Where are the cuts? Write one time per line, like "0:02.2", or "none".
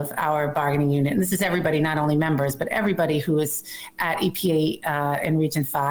none